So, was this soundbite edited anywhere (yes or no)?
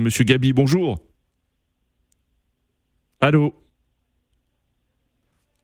no